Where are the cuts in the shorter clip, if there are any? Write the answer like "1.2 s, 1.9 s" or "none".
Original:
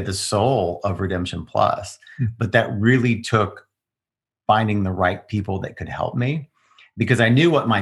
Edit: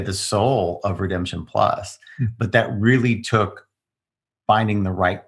none